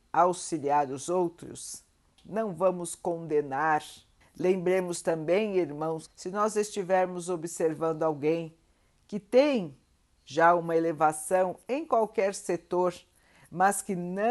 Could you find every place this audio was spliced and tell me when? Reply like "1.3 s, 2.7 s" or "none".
2.2 s, 4.2 s, 6.1 s